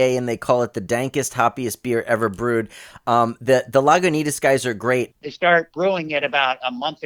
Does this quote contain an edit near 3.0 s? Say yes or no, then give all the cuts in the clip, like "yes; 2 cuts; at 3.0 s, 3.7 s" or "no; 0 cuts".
no; 1 cut; at 5.1 s